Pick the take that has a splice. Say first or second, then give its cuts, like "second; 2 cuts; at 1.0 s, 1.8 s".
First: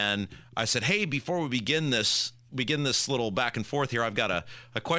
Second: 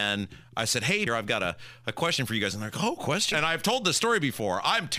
second; 2 cuts; at 1.1 s, 3.3 s